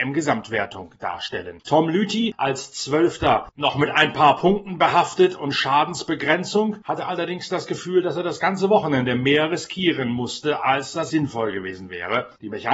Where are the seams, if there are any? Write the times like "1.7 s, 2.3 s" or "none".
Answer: 1.6 s, 11.1 s